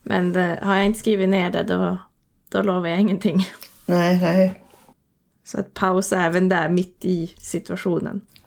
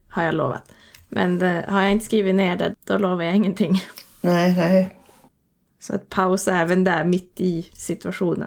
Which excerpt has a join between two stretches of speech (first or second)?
second